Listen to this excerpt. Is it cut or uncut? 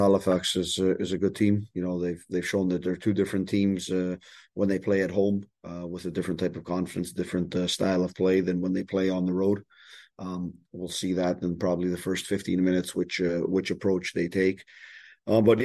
uncut